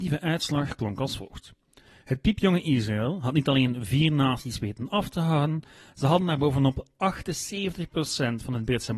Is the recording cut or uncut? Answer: uncut